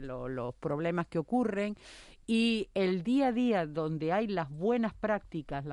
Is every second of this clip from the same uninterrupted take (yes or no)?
yes